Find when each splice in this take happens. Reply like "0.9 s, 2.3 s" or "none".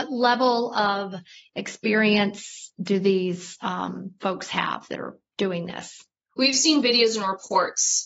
none